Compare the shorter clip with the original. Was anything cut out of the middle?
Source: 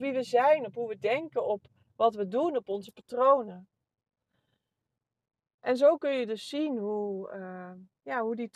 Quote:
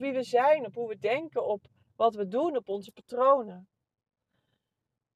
no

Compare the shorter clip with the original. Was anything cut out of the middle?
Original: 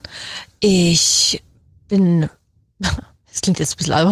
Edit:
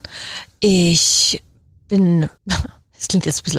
yes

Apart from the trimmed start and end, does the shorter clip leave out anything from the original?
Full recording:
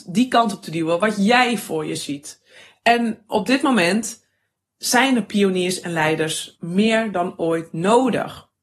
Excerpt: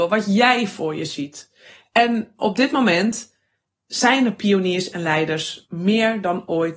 no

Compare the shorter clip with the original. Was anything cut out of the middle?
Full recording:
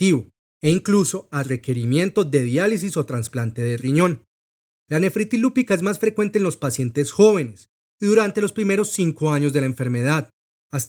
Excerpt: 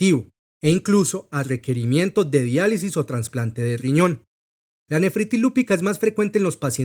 no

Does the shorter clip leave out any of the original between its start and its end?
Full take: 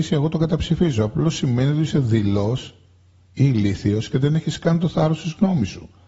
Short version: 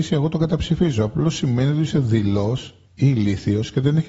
yes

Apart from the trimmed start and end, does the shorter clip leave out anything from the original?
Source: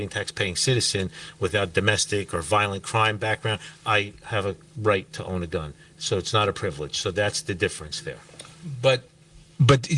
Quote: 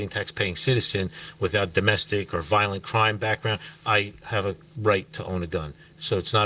no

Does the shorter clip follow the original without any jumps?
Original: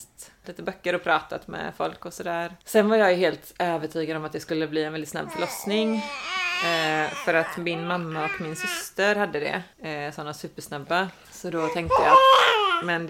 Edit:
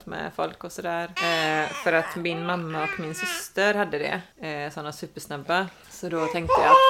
no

